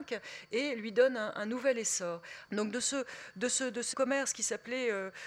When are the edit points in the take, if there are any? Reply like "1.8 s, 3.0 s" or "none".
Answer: 2.5 s, 3.9 s